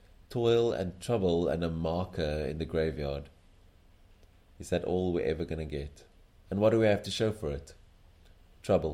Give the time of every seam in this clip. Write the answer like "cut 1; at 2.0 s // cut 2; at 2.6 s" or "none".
cut 1; at 4.5 s // cut 2; at 6.4 s